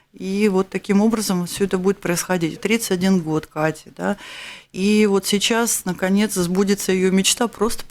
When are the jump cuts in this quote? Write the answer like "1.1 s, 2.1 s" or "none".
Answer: 2.6 s